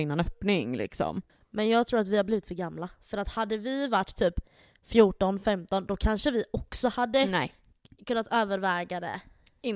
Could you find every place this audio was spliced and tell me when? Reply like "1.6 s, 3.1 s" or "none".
none